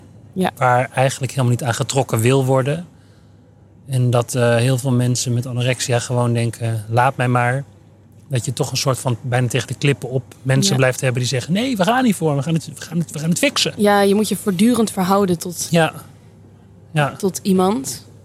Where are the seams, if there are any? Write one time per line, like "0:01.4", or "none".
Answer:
none